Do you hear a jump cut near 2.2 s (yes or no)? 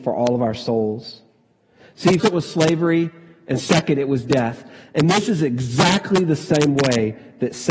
yes